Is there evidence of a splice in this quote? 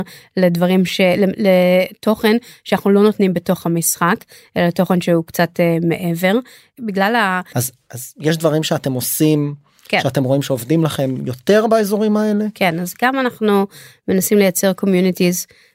yes; 1 cut; at 7.5 s

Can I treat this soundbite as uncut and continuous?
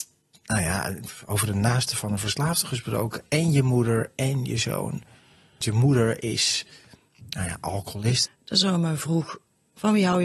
no; 2 cuts; at 5.6 s, 8.3 s

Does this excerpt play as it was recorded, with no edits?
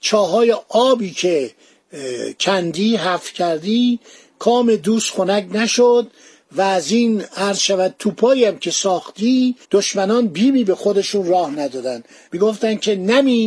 no; 1 cut; at 9.6 s

